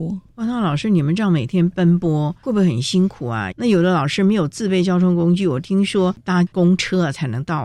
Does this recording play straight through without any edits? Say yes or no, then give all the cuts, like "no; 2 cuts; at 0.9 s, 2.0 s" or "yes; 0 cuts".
no; 1 cut; at 3.5 s